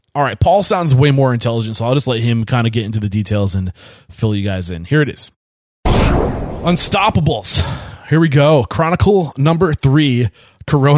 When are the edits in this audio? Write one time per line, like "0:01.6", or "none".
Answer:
none